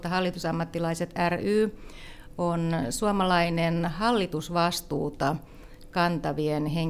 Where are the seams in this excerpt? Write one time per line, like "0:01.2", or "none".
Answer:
none